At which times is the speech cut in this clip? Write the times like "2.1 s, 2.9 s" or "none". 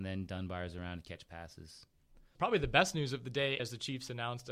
2.3 s, 3.6 s

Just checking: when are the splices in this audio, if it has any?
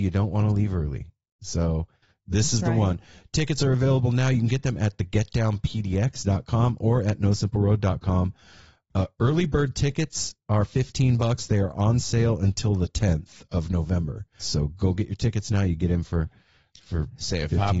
14.4 s

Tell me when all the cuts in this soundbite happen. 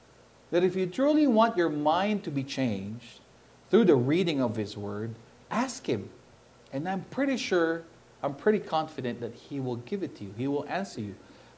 none

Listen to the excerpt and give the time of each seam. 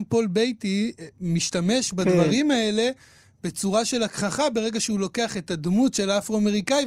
none

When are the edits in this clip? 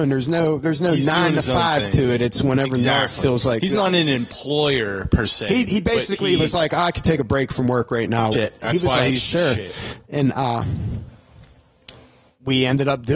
8.3 s

